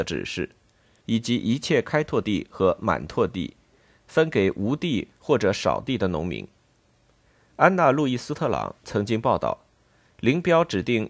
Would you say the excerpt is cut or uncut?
cut